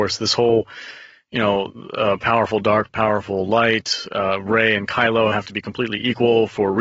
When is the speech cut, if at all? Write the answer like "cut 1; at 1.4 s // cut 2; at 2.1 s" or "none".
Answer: none